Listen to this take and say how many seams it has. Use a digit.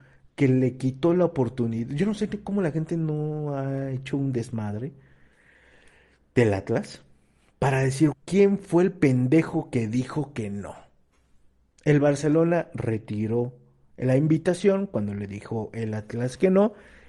1